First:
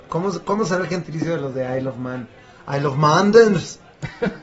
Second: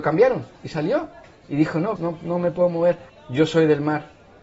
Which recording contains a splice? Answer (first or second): second